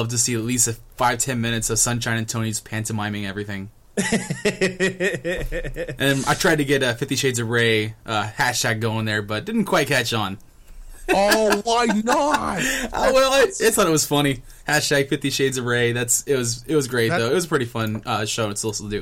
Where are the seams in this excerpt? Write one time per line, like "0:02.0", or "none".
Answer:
none